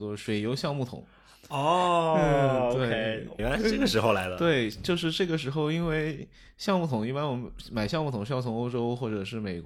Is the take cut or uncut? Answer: cut